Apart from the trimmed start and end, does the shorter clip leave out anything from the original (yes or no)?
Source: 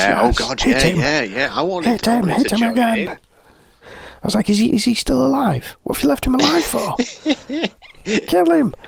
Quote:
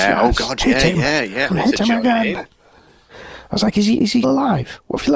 yes